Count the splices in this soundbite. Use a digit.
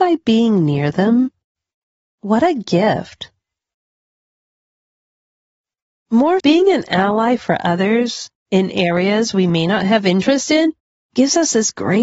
2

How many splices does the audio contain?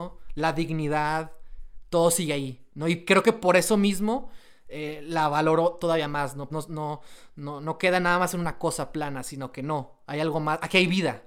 1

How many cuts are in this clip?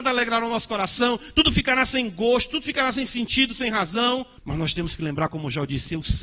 1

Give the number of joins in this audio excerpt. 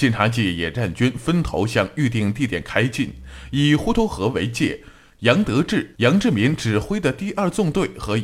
0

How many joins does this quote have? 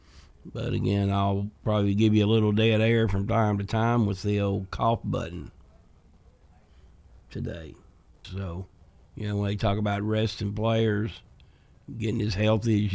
2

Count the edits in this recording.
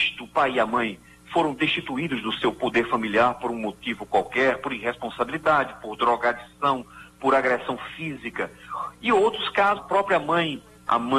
1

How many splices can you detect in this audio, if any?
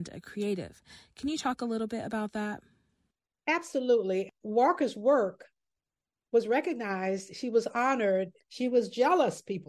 1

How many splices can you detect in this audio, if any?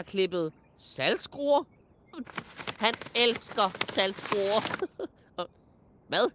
1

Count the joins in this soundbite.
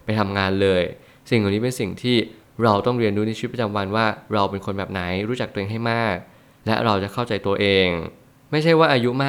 0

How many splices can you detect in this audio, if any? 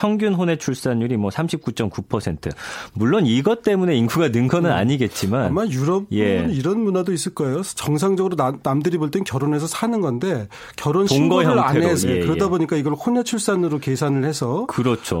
1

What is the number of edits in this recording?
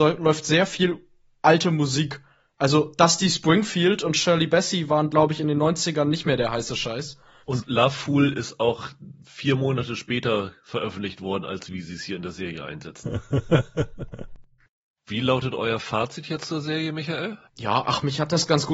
1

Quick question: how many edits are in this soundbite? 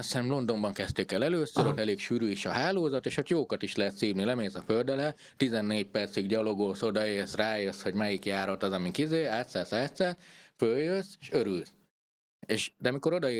0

